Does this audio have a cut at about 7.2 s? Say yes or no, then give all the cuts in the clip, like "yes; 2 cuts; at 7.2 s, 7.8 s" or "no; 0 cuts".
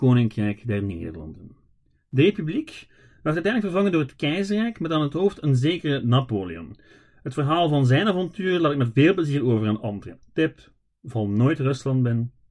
no; 1 cut; at 10.2 s